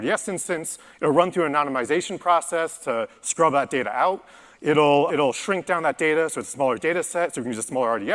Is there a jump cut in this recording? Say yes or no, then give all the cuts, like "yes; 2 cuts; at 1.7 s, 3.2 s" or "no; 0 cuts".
yes; 1 cut; at 5.1 s